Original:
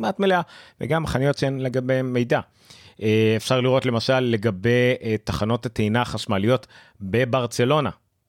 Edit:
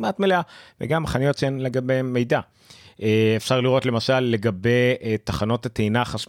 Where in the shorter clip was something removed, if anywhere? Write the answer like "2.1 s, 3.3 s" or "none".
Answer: none